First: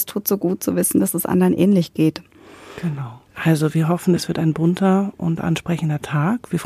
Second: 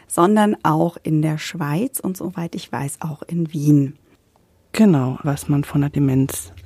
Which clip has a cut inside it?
second; 1 cut; at 5.2 s

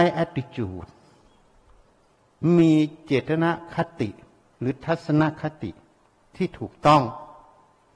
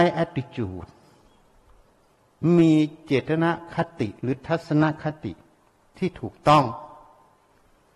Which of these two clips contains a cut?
second; 1 cut; at 4.2 s

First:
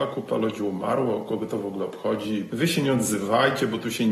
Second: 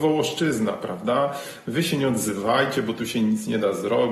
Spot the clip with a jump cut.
first; 1 cut; at 2.5 s

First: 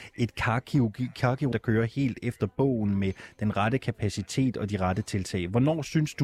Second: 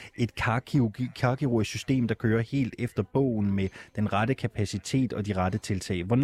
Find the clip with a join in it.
first; 1 cut; at 1.5 s

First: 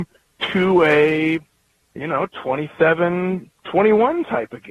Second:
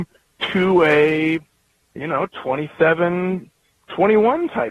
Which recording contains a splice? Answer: first; 1 cut; at 3.6 s

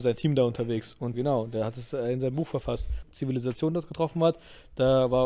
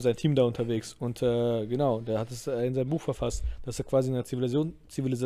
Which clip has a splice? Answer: first; 2 cuts; at 1.1 s, 3.0 s

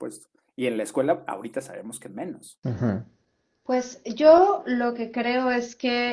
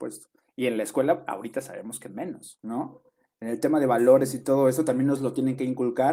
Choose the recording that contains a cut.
second; 1 cut; at 2.6 s

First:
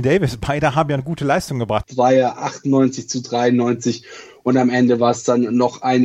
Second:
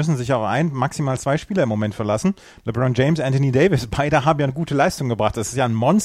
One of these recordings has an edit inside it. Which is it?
first; 1 cut; at 1.8 s

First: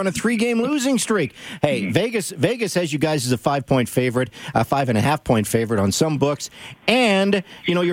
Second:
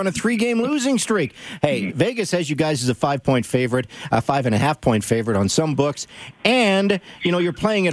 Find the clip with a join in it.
second; 1 cut; at 1.9 s

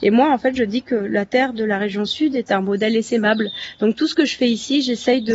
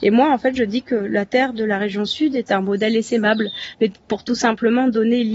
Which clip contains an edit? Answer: second; 1 cut; at 3.7 s

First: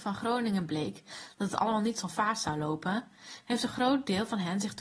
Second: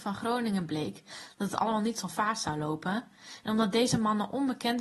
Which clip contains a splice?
second; 1 cut; at 3.4 s

